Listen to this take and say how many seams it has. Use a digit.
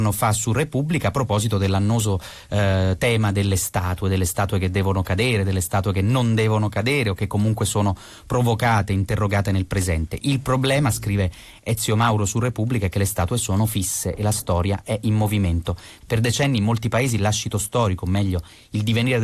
1